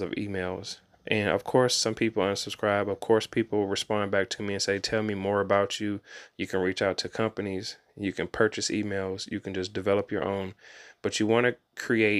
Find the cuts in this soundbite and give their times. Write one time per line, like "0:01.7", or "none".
0:06.3